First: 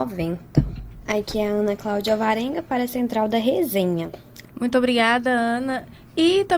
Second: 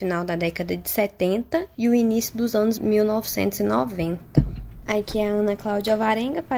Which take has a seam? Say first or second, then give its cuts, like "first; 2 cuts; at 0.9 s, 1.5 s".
first; 1 cut; at 4.4 s